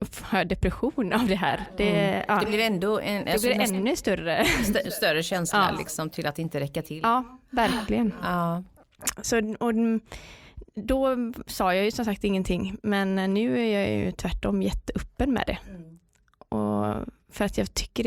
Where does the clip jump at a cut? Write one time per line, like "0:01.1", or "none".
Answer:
none